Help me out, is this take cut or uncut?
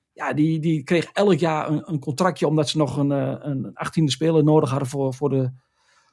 uncut